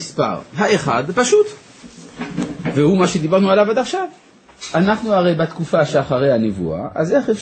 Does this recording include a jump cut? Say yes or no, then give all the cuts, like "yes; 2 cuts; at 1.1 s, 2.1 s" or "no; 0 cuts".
no; 0 cuts